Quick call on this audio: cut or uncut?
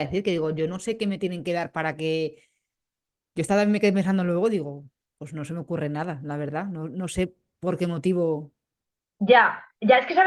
uncut